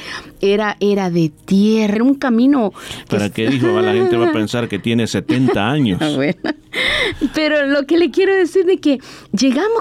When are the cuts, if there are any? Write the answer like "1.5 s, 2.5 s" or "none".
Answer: 1.9 s